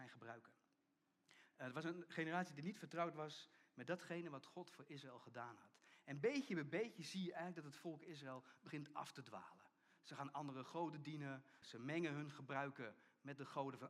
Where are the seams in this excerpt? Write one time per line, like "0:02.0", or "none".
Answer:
0:11.6